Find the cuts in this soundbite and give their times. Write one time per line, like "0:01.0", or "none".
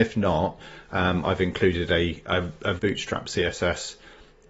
0:02.8